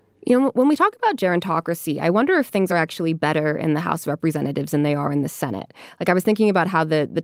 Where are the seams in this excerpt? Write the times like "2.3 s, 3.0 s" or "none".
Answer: none